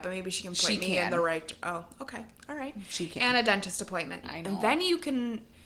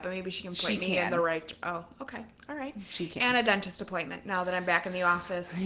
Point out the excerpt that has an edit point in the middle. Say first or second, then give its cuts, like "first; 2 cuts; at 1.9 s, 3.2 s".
first; 1 cut; at 4.2 s